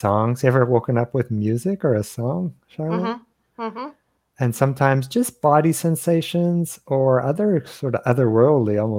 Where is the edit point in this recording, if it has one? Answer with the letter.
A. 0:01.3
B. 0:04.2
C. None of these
C